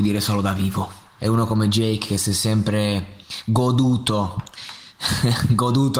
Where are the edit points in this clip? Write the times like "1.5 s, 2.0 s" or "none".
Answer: 1.2 s